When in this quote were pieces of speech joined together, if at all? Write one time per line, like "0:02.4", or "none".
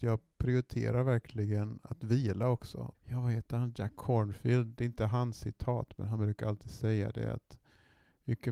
0:02.9